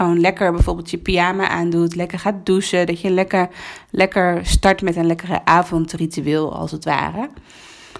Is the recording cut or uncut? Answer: uncut